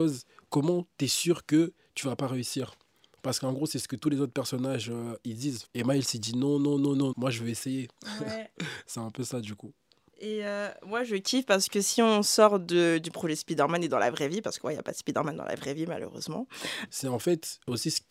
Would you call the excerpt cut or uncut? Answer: cut